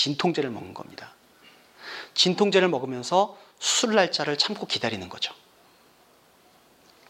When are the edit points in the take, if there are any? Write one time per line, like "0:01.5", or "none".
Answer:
none